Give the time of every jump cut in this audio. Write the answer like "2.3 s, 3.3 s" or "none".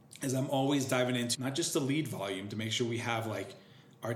1.3 s